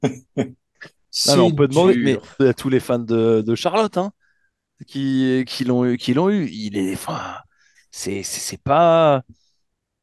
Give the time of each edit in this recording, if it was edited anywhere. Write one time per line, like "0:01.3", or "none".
0:02.4